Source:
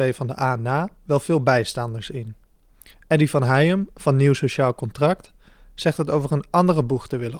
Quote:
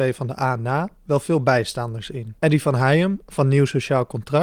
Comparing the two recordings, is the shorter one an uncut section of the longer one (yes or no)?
no